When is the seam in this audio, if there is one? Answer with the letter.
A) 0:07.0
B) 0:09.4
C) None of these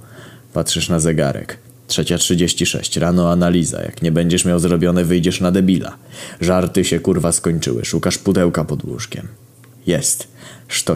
C